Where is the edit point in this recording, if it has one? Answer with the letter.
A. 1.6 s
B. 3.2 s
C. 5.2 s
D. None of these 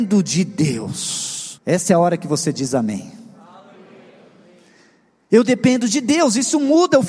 A